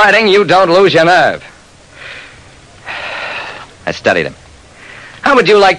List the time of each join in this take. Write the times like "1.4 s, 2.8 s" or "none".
3.7 s